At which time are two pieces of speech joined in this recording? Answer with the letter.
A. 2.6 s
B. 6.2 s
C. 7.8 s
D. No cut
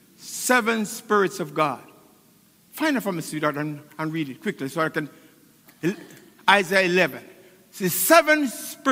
D